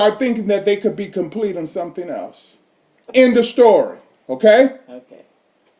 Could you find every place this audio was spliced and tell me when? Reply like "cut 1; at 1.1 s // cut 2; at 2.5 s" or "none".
cut 1; at 2.9 s